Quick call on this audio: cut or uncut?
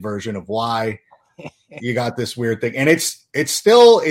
uncut